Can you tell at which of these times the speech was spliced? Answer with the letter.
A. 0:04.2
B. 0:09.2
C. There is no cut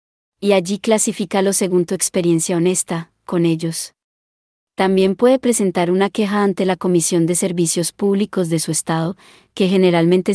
C